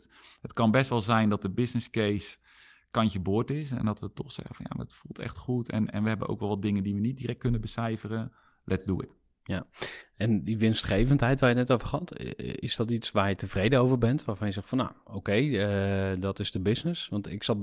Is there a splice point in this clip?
no; 0 cuts

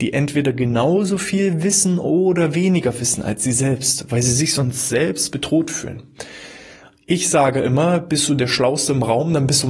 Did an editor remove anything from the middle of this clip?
no; 0 cuts

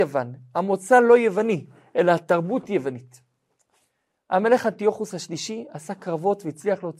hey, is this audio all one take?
yes; 0 cuts

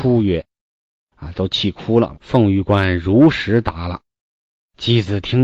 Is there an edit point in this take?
yes; 1 cut; at 2.1 s

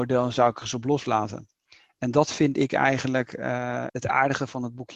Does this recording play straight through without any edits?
no; 1 cut; at 3.9 s

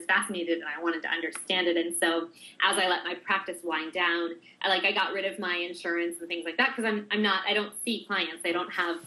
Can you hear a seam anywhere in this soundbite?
no; 0 cuts

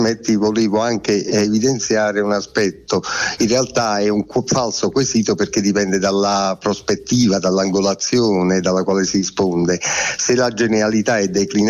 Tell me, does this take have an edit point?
yes; 1 cut; at 3.4 s

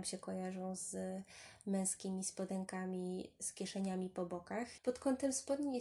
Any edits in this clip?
yes; 1 cut; at 4.8 s

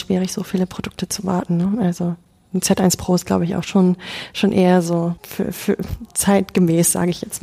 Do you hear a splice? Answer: no; 0 cuts

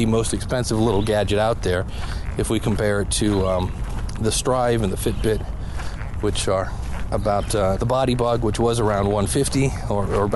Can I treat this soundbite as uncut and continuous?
no; 1 cut; at 7.8 s

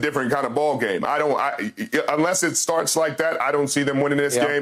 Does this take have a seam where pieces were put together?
no; 0 cuts

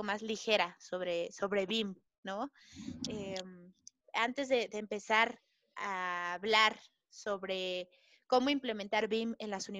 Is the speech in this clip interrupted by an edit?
no; 0 cuts

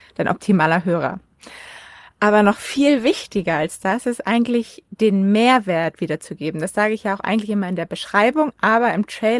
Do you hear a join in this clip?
no; 0 cuts

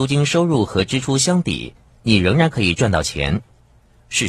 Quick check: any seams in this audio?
yes; 1 cut; at 2.0 s

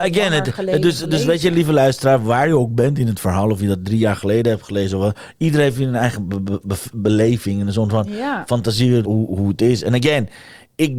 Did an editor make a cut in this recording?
yes; 1 cut; at 9.0 s

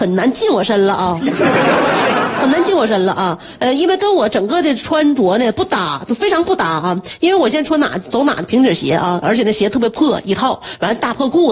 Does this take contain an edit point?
no; 0 cuts

